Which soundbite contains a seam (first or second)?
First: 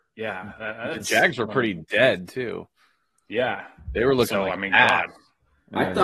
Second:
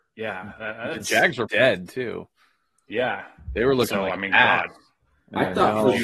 second